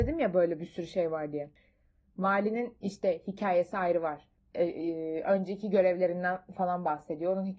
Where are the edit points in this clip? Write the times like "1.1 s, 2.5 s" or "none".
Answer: 2.1 s